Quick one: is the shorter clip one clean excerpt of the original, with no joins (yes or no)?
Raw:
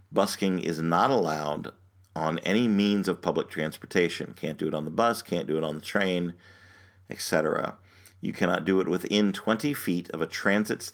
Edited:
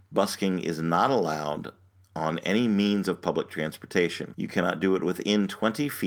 no